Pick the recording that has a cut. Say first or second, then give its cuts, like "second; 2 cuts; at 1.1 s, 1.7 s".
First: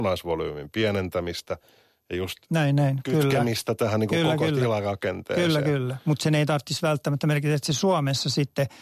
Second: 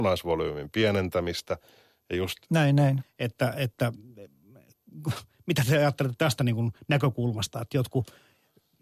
second; 1 cut; at 3.0 s